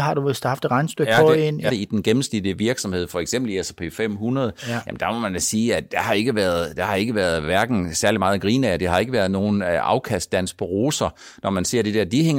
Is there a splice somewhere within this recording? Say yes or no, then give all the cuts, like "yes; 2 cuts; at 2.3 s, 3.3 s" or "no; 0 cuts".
yes; 1 cut; at 1.7 s